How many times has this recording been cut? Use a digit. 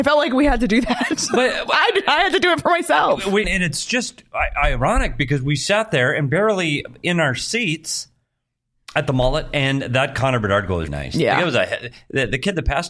2